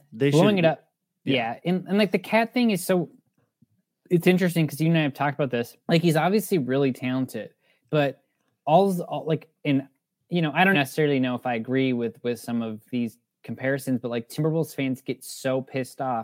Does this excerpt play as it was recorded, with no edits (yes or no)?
no